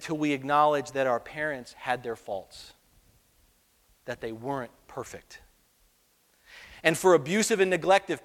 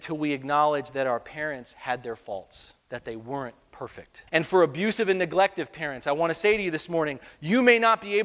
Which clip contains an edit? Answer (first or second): second